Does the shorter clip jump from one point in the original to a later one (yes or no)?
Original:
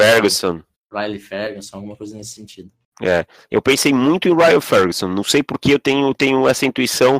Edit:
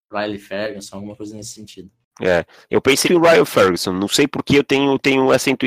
yes